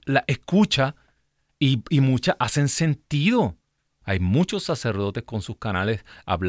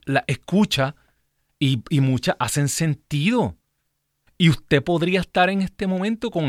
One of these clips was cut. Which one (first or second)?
first